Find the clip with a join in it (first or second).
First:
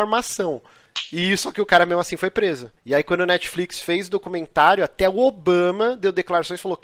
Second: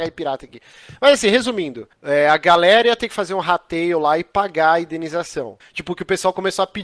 second